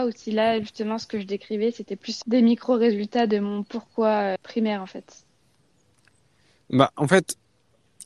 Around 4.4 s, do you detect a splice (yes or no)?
yes